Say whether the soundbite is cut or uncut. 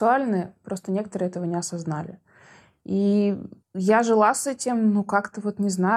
cut